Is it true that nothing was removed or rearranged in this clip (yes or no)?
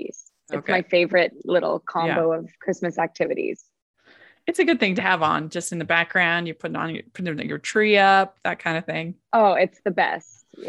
yes